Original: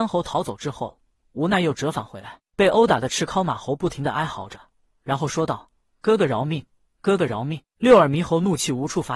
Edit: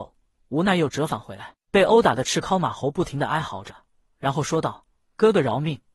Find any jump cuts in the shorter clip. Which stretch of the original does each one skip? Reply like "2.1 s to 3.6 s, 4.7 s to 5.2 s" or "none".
none